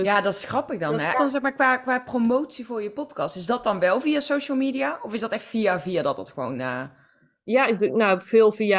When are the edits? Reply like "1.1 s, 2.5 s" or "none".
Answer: 1.1 s